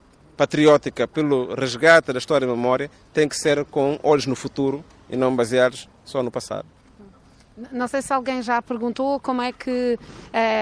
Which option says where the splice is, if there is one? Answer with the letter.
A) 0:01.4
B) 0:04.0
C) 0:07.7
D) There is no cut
D